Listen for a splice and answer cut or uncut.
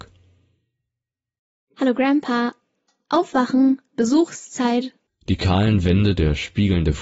cut